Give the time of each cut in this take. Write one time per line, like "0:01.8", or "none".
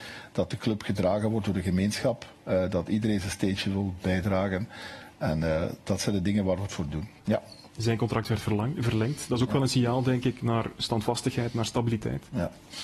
0:07.2